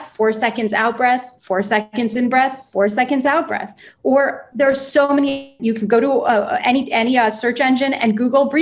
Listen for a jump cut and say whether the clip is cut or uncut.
cut